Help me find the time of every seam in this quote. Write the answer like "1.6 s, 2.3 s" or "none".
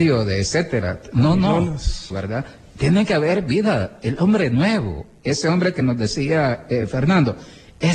2.1 s